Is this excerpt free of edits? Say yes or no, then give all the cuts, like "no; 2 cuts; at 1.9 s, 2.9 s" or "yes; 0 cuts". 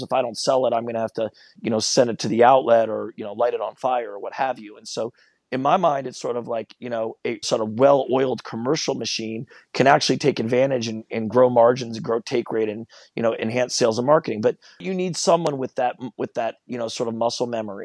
no; 1 cut; at 7.4 s